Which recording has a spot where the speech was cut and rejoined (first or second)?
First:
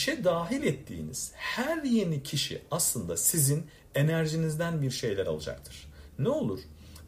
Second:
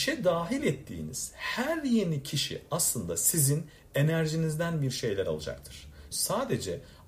second